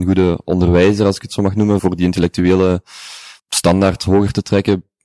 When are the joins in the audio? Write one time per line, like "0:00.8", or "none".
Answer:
0:01.8
0:03.4